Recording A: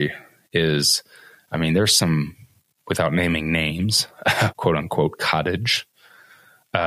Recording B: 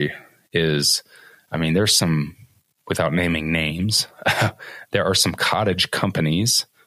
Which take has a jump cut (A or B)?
A